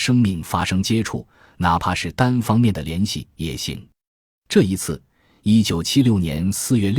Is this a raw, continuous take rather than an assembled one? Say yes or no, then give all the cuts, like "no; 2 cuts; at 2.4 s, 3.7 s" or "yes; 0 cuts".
yes; 0 cuts